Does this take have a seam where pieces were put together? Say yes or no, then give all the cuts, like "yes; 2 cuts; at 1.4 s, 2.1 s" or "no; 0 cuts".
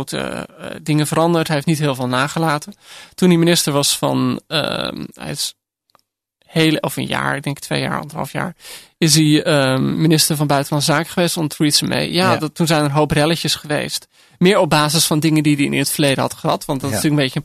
no; 0 cuts